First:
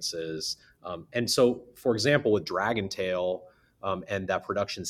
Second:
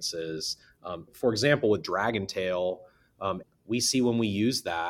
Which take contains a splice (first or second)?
second